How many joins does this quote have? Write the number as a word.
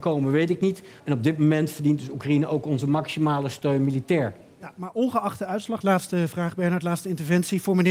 one